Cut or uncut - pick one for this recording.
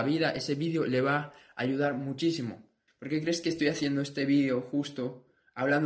cut